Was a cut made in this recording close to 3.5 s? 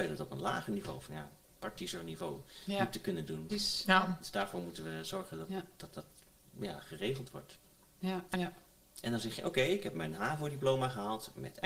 yes; 2 cuts; at 3.5 s, 8.3 s

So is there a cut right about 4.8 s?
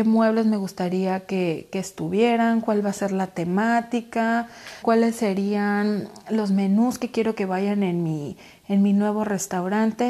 yes; 1 cut; at 4.8 s

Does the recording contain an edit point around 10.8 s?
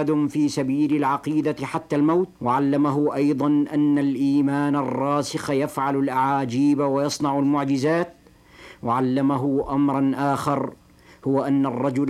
no; 1 cut; at 2.4 s

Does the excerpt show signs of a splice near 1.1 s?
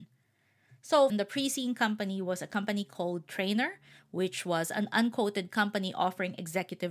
yes; 1 cut; at 1.1 s

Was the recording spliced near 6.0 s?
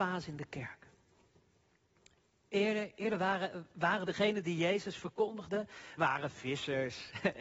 yes; 2 cuts; at 4.1 s, 6.0 s

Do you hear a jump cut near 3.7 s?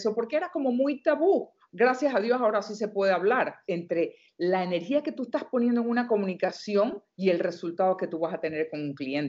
yes; 1 cut; at 3.7 s

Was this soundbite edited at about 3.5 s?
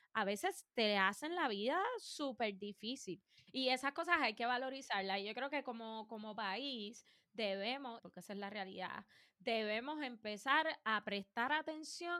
yes; 2 cuts; at 3.5 s, 8.0 s

